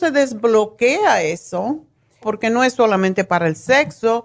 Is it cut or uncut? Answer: cut